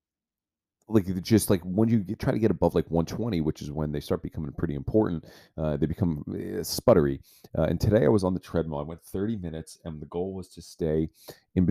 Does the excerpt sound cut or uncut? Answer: uncut